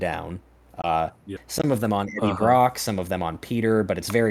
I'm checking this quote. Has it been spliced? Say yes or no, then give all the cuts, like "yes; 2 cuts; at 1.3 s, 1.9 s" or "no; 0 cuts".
yes; 1 cut; at 1.4 s